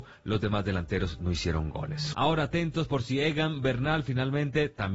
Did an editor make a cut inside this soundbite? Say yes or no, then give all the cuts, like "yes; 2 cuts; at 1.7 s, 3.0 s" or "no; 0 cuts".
yes; 1 cut; at 2.1 s